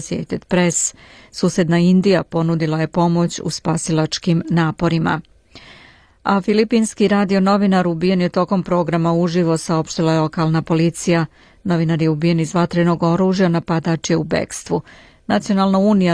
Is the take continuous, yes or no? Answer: yes